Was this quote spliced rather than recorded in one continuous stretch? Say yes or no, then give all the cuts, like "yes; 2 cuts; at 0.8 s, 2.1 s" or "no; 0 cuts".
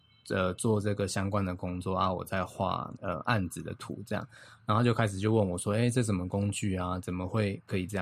no; 0 cuts